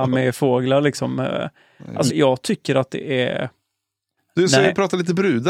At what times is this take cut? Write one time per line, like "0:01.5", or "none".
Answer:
0:02.1
0:04.2

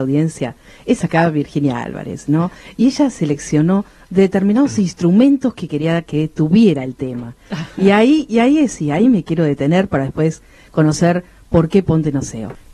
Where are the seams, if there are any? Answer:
none

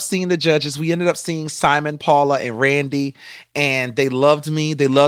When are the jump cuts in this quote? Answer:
none

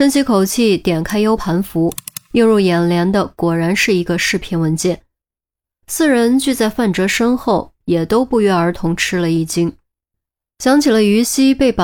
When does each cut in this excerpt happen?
0:01.4
0:07.8

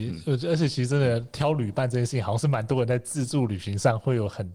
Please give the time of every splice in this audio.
none

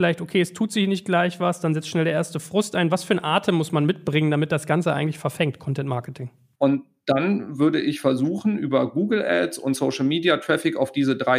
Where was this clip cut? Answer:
0:06.6

